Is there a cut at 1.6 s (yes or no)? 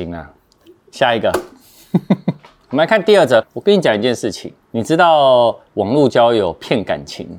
no